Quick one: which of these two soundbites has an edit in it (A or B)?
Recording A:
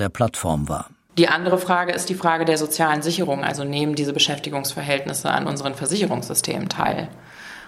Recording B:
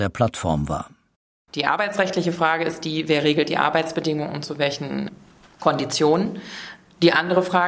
A